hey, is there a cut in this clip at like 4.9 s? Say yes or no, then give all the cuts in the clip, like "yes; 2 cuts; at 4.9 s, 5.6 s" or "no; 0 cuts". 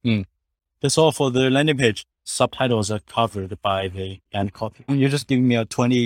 yes; 2 cuts; at 2.3 s, 4.9 s